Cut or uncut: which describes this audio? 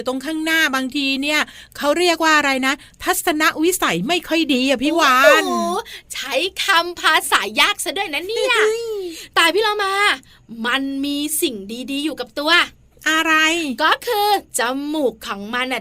uncut